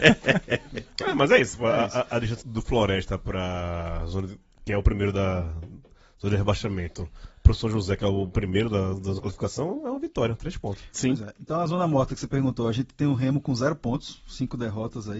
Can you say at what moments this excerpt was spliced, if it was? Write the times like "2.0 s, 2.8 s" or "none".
2.4 s